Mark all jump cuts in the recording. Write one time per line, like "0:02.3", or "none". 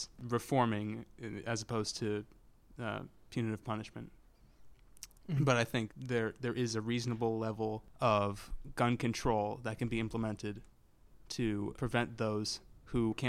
0:05.9
0:11.8